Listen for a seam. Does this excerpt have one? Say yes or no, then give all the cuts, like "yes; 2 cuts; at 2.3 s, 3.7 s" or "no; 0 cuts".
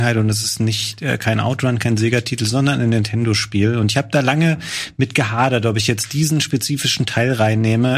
no; 0 cuts